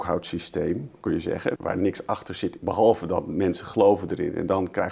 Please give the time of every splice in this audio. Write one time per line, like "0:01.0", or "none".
0:01.6

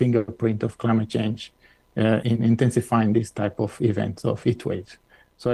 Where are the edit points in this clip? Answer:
0:02.2

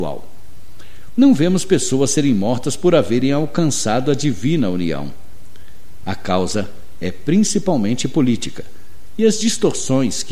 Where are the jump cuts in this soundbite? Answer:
0:01.1
0:06.0

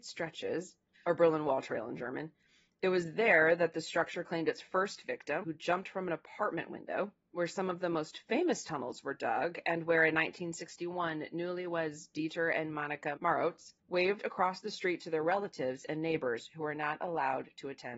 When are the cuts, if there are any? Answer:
0:00.9
0:05.4
0:13.8

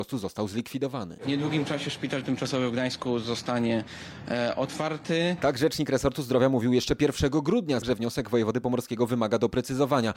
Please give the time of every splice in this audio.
0:07.8

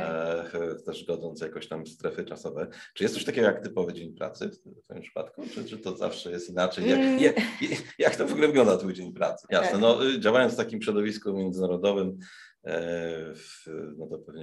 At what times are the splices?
0:07.2
0:09.5

